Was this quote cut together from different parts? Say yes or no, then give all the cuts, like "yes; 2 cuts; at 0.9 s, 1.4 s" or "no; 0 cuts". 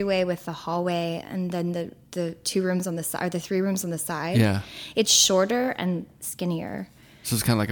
no; 0 cuts